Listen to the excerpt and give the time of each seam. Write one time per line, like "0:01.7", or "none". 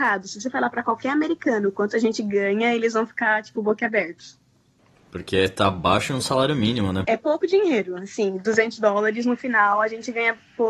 0:07.0

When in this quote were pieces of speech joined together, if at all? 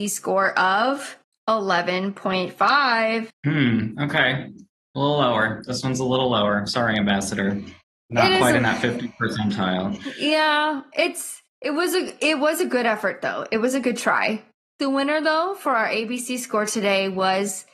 none

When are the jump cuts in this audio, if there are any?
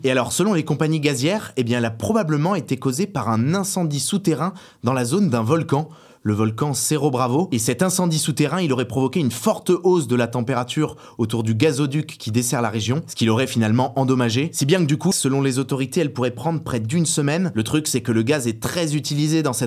0:15.1

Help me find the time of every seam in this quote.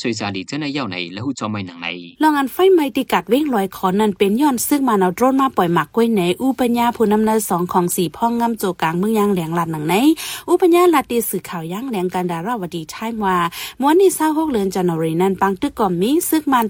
0:02.1

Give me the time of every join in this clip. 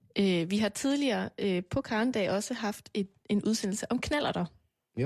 none

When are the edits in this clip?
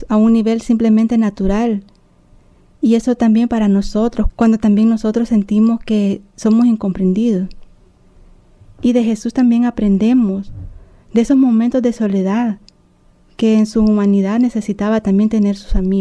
0:04.3
0:08.6

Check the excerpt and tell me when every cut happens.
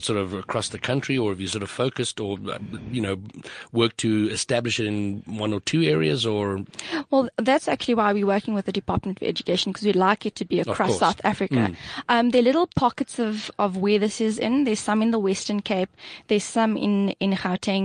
none

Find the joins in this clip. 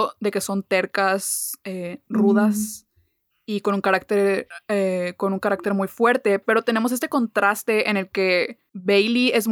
none

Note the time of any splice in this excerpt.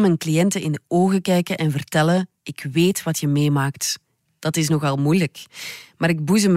0:02.4
0:04.3

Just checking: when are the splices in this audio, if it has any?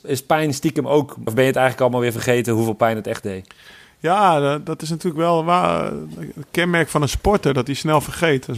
0:01.3

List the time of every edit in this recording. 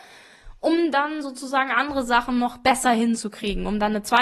none

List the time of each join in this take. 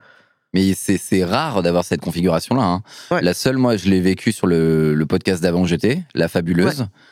none

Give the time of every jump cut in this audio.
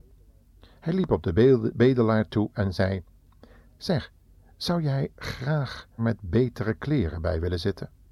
0:06.0

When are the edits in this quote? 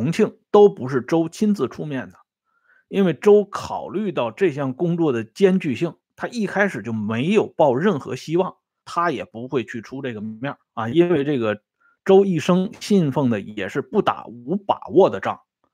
0:08.8
0:10.6

